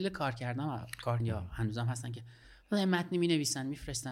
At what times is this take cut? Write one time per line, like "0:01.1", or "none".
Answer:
0:01.2